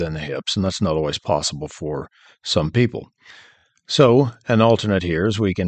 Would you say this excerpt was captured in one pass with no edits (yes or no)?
yes